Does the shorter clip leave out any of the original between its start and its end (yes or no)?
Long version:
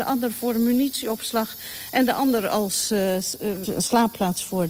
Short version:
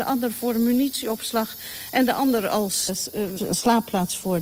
yes